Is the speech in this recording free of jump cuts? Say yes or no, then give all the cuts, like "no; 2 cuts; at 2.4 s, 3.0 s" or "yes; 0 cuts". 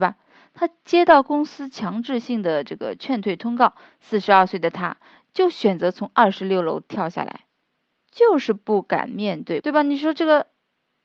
no; 1 cut; at 9.6 s